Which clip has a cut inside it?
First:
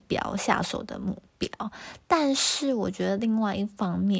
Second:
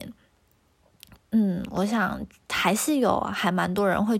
second; 1 cut; at 1.2 s

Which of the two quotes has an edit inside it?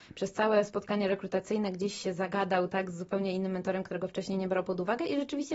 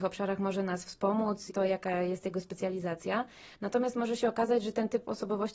second; 1 cut; at 1.5 s

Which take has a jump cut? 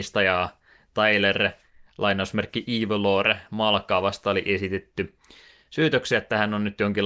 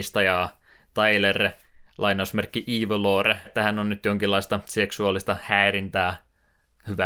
second; 1 cut; at 3.4 s

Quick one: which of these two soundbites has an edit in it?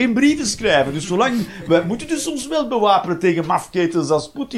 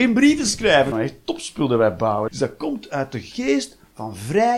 second; 2 cuts; at 0.9 s, 2.3 s

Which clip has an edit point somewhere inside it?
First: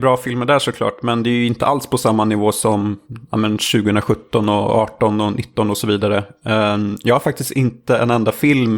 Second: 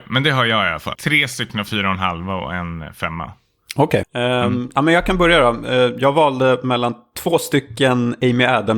second; 2 cuts; at 1.0 s, 4.0 s

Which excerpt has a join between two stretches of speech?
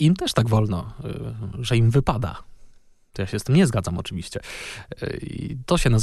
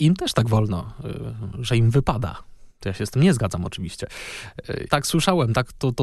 second; 2 cuts; at 2.7 s, 4.9 s

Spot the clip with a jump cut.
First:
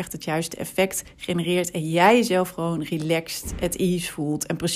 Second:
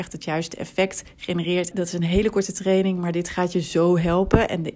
second; 1 cut; at 1.7 s

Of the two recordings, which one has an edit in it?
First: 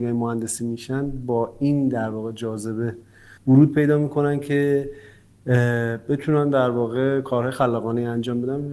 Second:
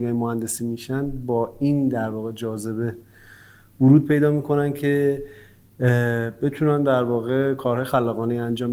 first; 1 cut; at 3.4 s

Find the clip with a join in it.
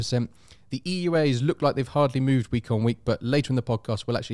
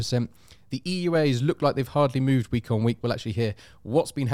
second; 1 cut; at 3.0 s

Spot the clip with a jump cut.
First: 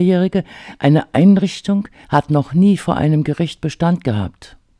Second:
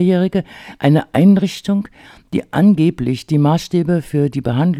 first; 1 cut; at 2.0 s

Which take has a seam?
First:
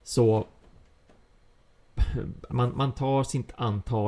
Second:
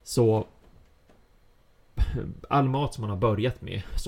first; 1 cut; at 2.5 s

